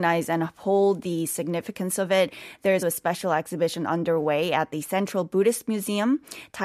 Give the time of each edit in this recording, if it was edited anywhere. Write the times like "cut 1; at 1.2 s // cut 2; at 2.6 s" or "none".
cut 1; at 2.8 s